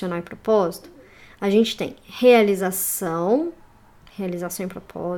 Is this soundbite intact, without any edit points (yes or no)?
yes